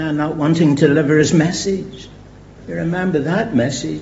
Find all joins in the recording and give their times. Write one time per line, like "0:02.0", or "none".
0:02.6